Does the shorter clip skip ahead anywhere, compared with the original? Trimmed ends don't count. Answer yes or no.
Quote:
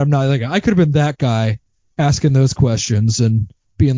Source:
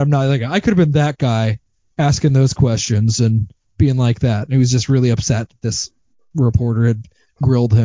no